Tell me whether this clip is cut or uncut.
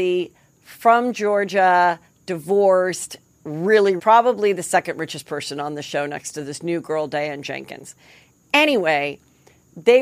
cut